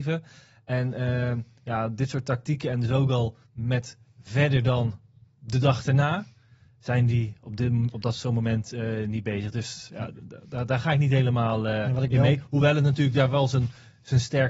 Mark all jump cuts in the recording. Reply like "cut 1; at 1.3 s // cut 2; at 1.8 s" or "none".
cut 1; at 3.4 s